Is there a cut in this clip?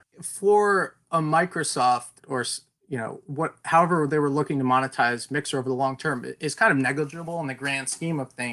yes; 1 cut; at 2.2 s

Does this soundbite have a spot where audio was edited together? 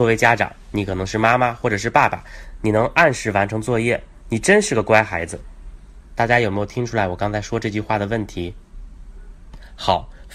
yes; 1 cut; at 2.6 s

